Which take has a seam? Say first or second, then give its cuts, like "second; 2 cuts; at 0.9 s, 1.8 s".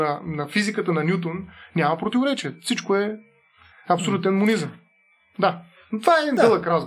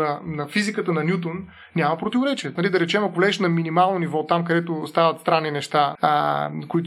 second; 2 cuts; at 2.6 s, 6.0 s